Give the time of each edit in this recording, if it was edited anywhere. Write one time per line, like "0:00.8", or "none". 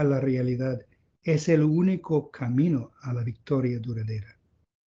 none